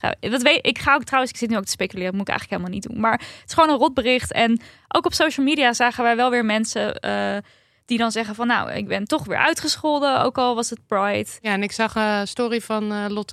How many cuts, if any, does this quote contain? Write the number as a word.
zero